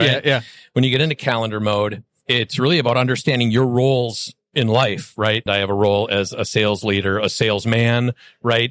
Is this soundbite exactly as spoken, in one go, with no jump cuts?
no; 1 cut; at 5.5 s

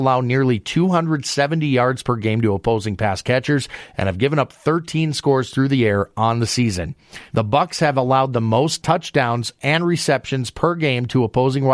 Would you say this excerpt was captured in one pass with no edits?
no; 1 cut; at 7.3 s

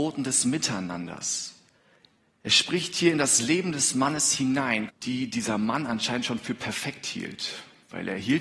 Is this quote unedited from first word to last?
no; 1 cut; at 4.9 s

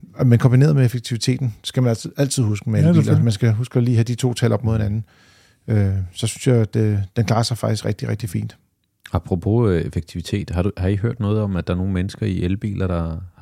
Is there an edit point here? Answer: no; 0 cuts

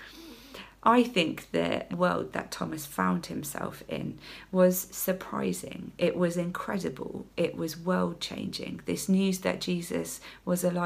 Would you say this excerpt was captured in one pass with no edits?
no; 1 cut; at 1.9 s

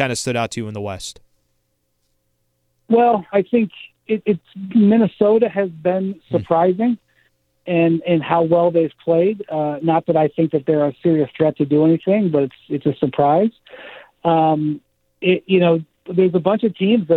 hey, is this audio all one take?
no; 1 cut; at 3.3 s

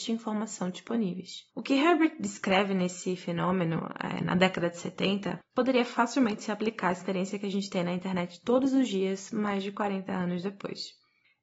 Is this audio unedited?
no; 1 cut; at 1.5 s

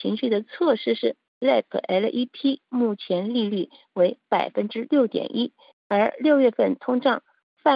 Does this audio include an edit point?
yes; 2 cuts; at 1.3 s, 5.7 s

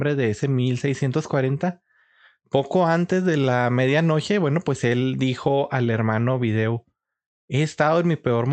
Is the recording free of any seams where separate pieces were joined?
yes; 0 cuts

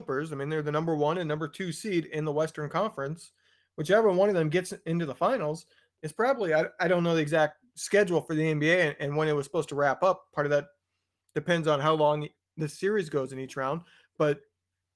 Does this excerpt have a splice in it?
no; 0 cuts

